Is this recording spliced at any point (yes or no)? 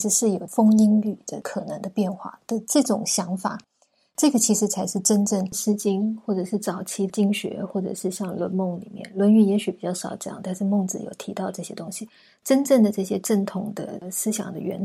no